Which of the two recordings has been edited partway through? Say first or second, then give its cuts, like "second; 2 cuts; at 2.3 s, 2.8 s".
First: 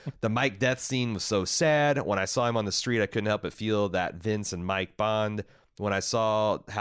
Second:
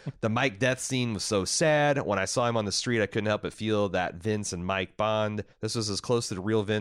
second; 1 cut; at 5.5 s